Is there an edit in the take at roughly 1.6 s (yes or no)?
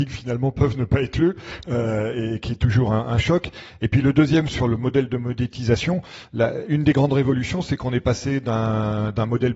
no